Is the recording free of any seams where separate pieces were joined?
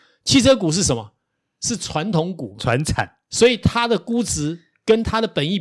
yes; 0 cuts

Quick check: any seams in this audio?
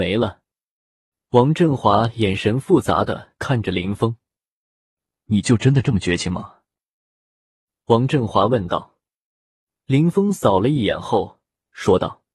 no; 0 cuts

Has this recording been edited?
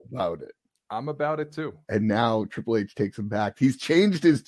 yes; 2 cuts; at 1.8 s, 3.5 s

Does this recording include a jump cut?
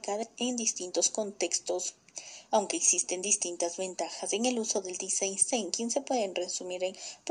yes; 1 cut; at 2.5 s

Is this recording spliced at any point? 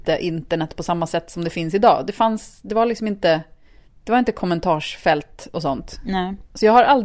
no; 0 cuts

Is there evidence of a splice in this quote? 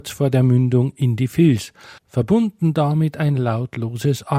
yes; 1 cut; at 2.0 s

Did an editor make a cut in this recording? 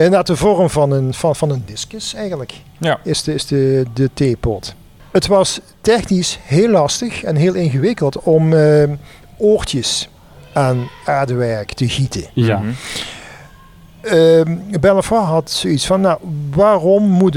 no; 0 cuts

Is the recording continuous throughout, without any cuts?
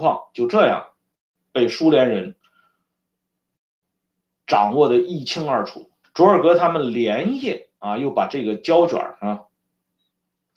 no; 1 cut; at 6.0 s

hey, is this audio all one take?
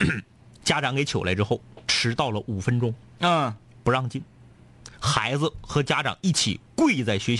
yes; 0 cuts

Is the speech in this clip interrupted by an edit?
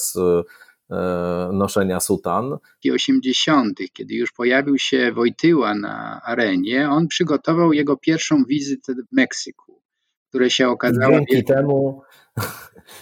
yes; 1 cut; at 2.8 s

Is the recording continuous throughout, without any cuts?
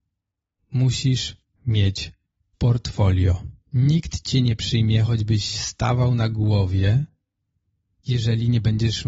no; 1 cut; at 3.6 s

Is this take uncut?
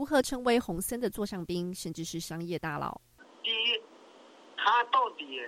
yes; 0 cuts

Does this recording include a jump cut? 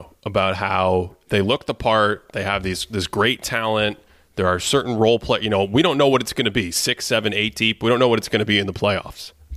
no; 0 cuts

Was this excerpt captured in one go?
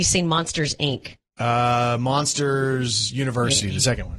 yes; 0 cuts

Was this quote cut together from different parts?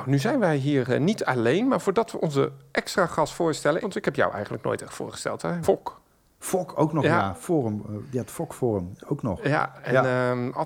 yes; 2 cuts; at 3.8 s, 5.6 s

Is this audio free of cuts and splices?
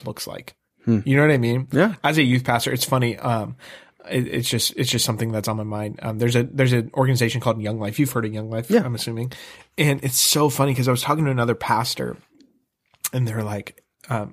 yes; 0 cuts

